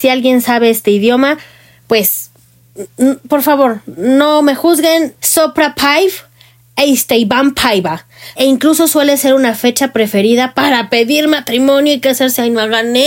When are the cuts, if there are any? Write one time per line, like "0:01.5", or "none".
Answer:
0:05.2
0:08.4